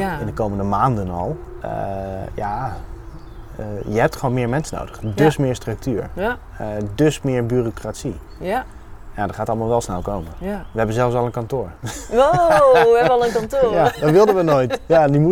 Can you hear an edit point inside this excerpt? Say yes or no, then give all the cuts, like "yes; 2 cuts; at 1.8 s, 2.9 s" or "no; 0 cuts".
no; 0 cuts